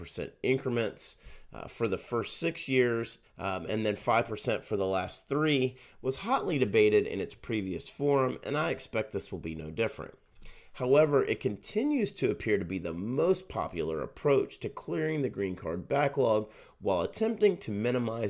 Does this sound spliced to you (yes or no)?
yes